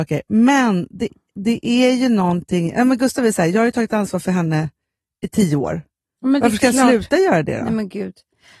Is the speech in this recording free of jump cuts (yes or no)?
yes